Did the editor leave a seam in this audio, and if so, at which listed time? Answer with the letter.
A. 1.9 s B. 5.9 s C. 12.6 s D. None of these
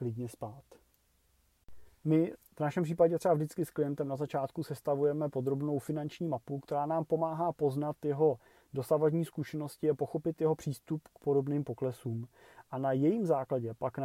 A